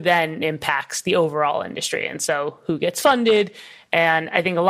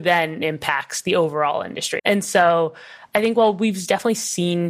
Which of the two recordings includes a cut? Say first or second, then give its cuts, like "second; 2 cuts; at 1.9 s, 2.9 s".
second; 1 cut; at 2.0 s